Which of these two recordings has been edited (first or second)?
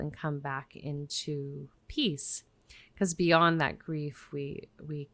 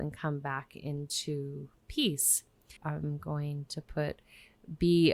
second